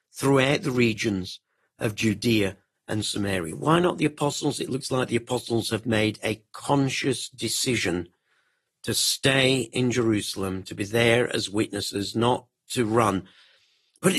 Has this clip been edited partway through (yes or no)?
no